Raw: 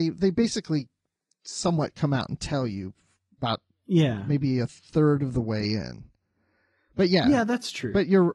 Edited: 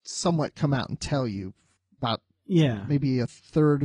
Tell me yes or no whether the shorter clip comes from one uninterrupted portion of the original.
yes